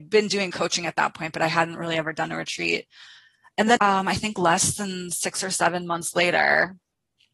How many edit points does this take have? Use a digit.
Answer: 1